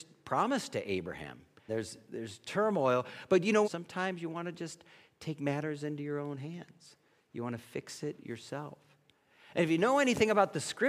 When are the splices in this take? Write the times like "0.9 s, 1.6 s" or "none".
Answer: 1.7 s, 3.6 s

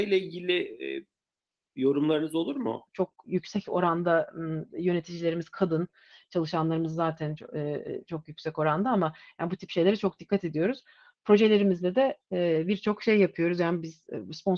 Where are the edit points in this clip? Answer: 2.9 s

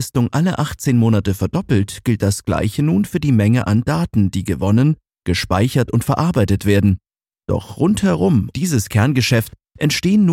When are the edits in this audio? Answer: 7.3 s, 8.5 s

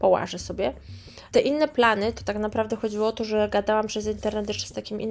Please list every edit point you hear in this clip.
1.3 s

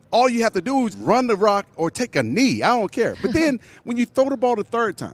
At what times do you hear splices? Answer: 0.9 s

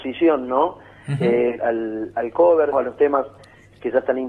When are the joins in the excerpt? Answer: 1.6 s, 2.7 s

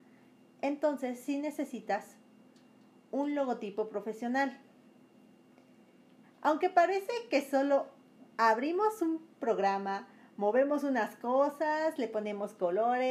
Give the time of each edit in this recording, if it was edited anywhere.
6.2 s

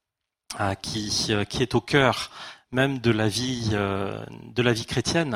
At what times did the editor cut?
none

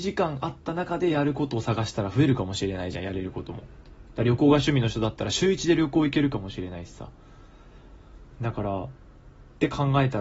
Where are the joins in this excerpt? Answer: none

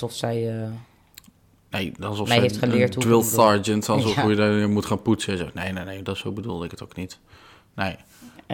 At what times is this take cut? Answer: none

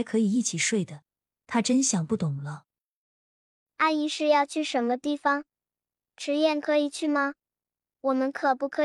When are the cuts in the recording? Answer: 3.7 s

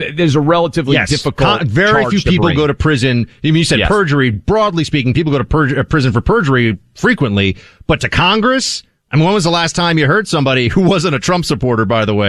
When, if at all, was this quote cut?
none

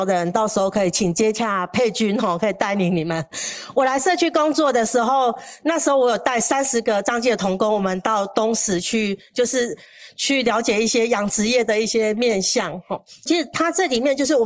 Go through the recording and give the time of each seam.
13.3 s

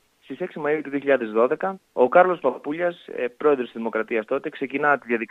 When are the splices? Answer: 1.8 s

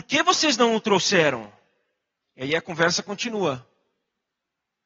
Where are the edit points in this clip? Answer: 2.2 s

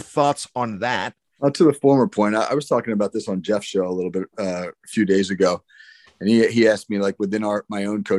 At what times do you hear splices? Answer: 1.2 s

